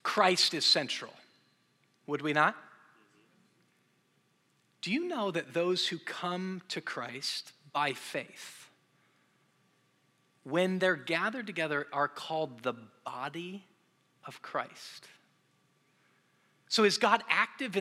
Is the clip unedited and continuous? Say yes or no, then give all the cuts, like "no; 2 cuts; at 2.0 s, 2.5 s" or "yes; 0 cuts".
yes; 0 cuts